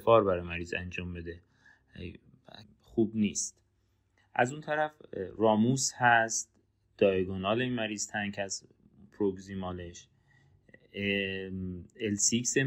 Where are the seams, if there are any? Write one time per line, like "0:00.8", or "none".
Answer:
0:02.6